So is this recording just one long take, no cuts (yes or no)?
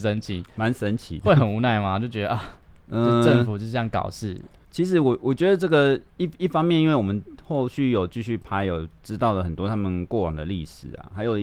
yes